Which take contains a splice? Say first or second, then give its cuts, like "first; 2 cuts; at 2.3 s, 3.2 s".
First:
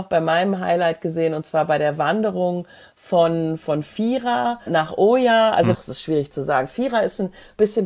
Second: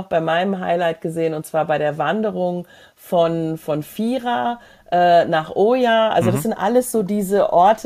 first; 2 cuts; at 4.7 s, 5.7 s